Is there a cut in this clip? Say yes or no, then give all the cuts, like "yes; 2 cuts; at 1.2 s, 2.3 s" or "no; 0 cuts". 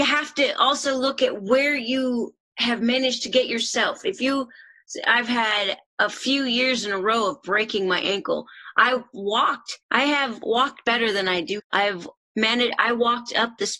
yes; 2 cuts; at 9.8 s, 11.6 s